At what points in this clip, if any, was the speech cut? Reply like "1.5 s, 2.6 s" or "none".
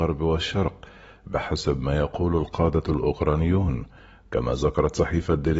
none